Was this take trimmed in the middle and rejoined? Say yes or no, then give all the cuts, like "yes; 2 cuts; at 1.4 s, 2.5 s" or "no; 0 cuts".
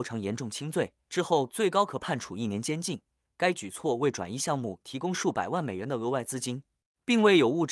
yes; 2 cuts; at 1.0 s, 3.3 s